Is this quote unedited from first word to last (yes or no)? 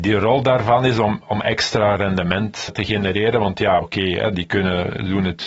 no